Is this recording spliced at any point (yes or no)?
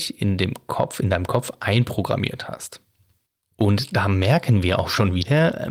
no